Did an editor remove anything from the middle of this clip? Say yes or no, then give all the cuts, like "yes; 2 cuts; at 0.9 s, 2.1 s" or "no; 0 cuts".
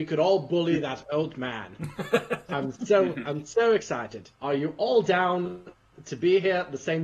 yes; 1 cut; at 4.3 s